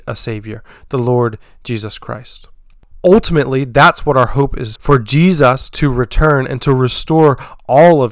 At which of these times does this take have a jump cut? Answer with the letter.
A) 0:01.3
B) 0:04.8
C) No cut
B